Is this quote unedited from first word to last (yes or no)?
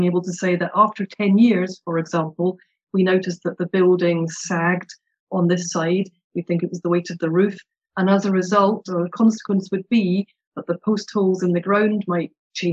yes